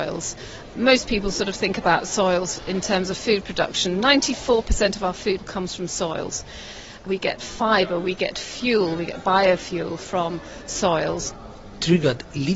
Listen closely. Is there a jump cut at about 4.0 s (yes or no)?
no